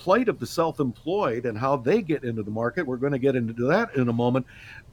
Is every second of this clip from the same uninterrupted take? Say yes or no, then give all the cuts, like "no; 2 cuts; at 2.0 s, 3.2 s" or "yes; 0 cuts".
yes; 0 cuts